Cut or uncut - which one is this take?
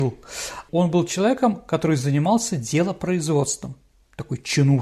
uncut